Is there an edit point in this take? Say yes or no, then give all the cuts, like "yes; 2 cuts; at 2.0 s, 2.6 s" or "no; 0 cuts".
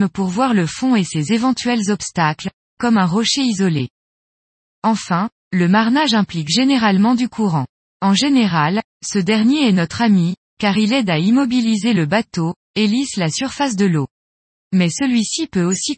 no; 0 cuts